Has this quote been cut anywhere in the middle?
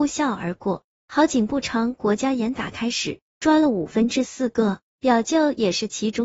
no; 0 cuts

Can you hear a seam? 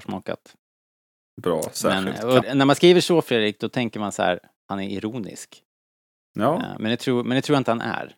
yes; 1 cut; at 2.4 s

